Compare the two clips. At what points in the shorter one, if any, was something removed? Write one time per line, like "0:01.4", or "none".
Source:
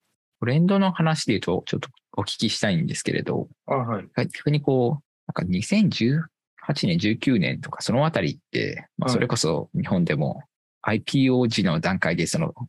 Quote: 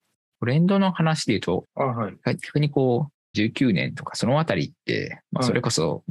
0:01.6
0:03.3